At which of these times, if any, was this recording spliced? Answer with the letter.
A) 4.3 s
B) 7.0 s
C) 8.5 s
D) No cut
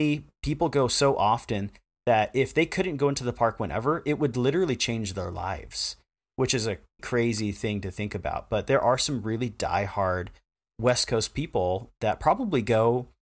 B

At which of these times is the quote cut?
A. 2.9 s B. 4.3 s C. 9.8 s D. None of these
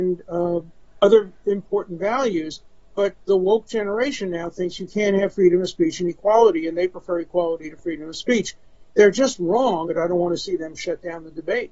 C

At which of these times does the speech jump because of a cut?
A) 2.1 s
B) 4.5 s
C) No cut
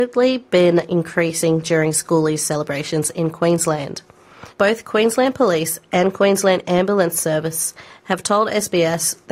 B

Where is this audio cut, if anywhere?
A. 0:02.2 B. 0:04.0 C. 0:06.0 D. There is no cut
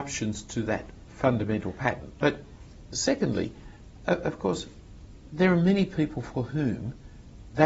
A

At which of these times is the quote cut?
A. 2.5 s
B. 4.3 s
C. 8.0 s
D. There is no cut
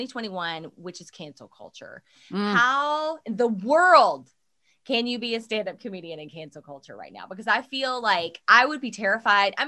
D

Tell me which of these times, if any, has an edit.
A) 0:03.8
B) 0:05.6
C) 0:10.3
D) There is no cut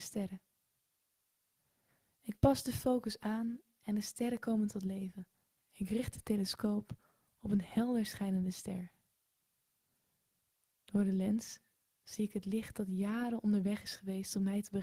B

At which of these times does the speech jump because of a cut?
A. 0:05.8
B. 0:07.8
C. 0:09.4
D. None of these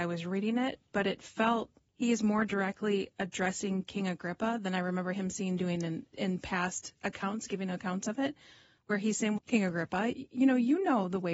C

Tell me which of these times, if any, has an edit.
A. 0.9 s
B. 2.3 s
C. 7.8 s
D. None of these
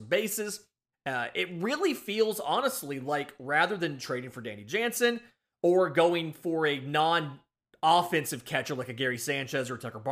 A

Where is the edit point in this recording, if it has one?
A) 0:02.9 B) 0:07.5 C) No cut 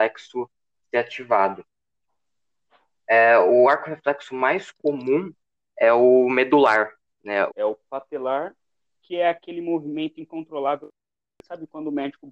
B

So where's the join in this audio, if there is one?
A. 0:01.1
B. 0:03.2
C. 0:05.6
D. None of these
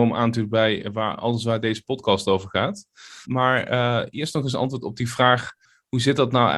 B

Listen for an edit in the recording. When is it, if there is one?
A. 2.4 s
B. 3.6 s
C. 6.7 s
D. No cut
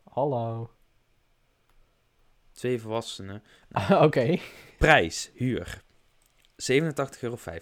B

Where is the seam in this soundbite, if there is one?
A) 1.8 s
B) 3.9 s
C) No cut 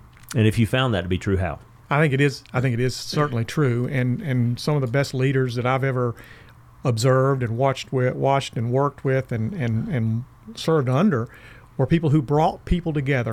A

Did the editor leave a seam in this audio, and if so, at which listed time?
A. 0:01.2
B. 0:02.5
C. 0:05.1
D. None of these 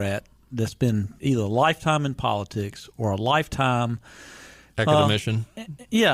A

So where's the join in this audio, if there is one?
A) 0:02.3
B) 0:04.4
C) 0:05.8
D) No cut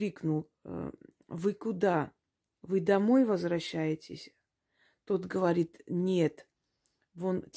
D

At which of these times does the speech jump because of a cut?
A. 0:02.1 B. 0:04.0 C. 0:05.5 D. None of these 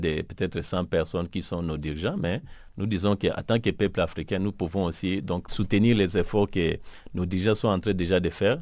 C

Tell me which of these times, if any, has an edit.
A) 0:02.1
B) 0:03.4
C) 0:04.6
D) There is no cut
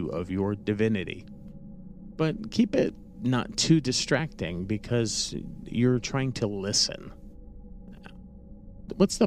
A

